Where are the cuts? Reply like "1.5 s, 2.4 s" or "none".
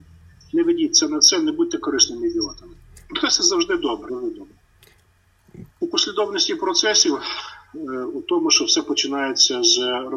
3.0 s, 4.1 s, 5.7 s